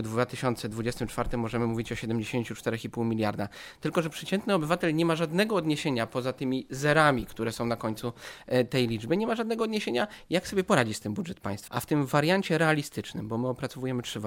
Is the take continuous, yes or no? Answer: no